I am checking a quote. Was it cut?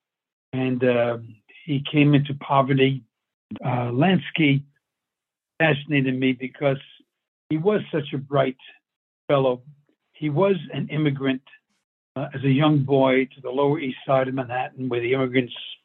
yes; 1 cut; at 3.6 s

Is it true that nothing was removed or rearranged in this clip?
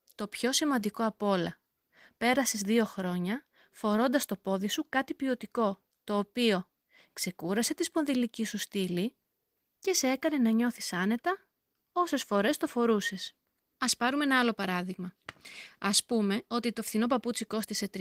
yes; 0 cuts

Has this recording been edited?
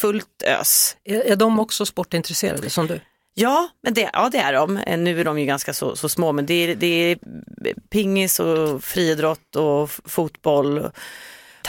no; 0 cuts

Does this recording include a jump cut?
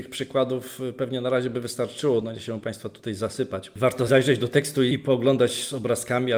no; 0 cuts

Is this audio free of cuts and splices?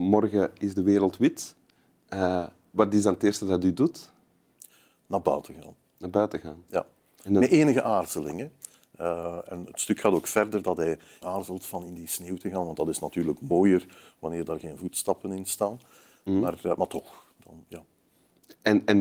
no; 1 cut; at 11.2 s

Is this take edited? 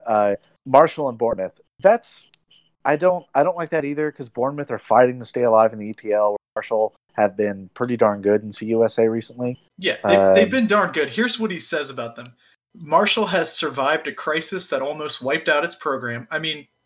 no; 0 cuts

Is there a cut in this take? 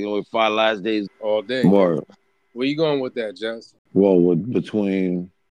yes; 1 cut; at 1.1 s

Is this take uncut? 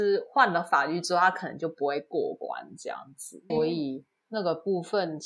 no; 1 cut; at 3.5 s

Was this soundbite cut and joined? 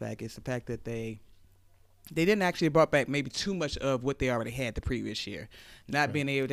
no; 0 cuts

